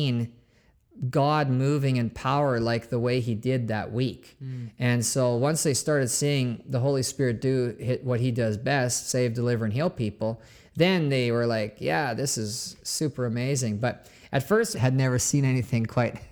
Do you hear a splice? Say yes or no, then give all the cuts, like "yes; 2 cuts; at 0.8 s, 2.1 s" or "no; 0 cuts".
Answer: yes; 1 cut; at 14.7 s